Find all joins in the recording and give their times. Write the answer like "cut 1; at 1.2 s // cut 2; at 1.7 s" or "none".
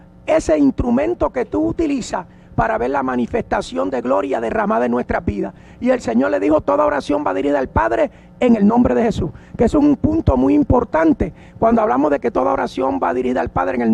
none